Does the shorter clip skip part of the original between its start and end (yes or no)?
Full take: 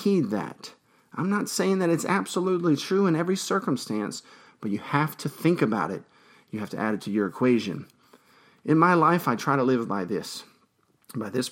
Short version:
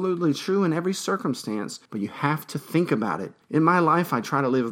yes